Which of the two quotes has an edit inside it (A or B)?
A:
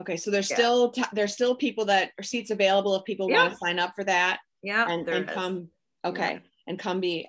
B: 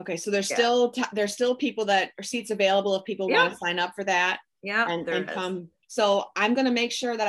B